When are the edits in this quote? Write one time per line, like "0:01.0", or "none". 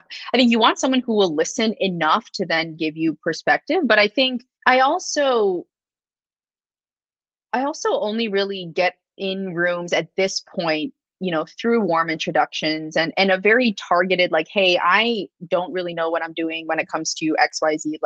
0:04.5